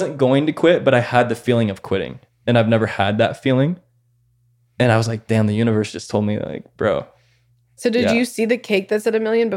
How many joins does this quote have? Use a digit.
1